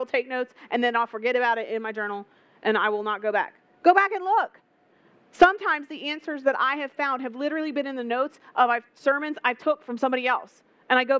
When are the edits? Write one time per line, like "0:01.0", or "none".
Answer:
none

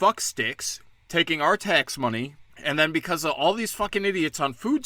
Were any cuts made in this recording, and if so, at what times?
0:02.5

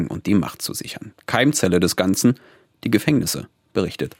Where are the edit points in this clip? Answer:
none

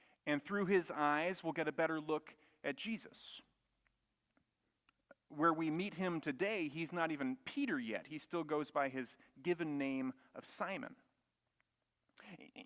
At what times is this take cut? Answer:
none

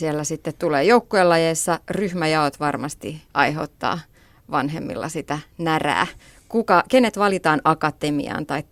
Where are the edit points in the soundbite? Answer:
0:03.3

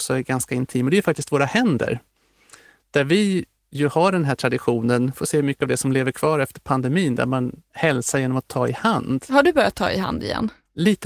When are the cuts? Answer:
none

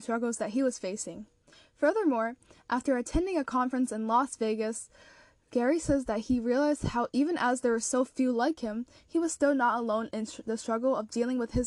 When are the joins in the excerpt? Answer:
none

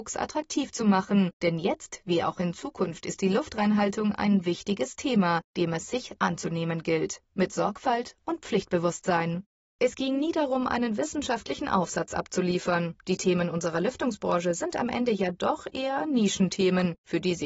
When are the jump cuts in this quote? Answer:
0:09.7

